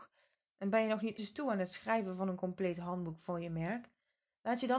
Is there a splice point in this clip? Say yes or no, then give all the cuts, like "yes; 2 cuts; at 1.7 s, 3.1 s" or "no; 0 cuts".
yes; 1 cut; at 1.2 s